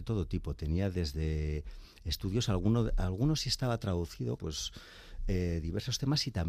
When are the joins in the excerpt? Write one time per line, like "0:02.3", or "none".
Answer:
0:04.4